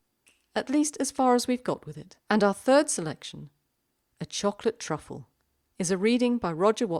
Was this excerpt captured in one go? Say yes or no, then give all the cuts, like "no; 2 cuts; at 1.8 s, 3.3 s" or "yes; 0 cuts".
no; 1 cut; at 2.2 s